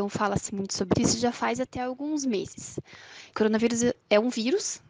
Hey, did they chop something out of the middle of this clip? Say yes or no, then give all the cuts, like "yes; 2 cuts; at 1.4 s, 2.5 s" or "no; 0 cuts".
yes; 2 cuts; at 0.9 s, 3.3 s